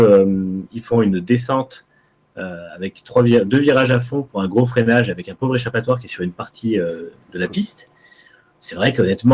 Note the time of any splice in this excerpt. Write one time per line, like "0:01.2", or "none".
none